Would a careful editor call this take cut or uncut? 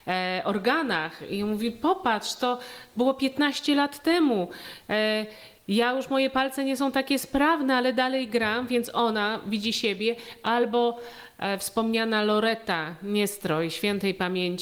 uncut